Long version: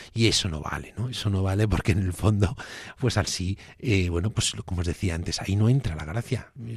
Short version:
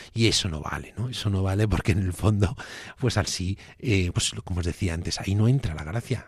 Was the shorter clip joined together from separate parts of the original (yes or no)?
yes